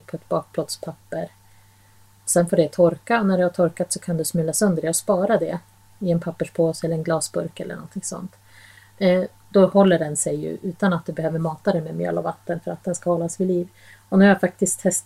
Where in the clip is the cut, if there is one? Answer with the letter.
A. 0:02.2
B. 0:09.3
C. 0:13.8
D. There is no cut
B